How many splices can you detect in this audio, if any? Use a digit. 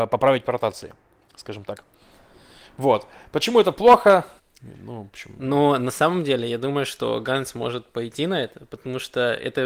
1